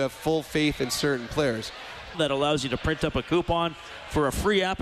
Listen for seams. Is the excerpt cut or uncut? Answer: cut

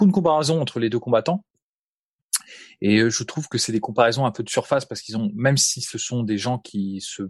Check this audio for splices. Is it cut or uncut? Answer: uncut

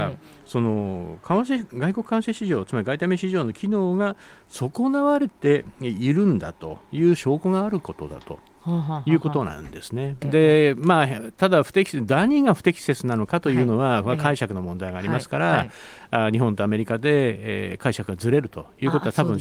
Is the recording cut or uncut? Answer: cut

